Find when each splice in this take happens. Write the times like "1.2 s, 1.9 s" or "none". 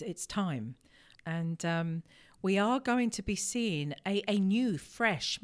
1.1 s